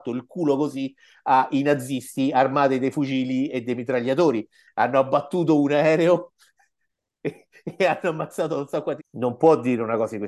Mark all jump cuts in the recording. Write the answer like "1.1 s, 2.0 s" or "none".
9.0 s